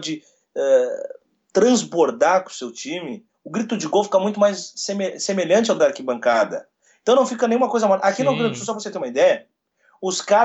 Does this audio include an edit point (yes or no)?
no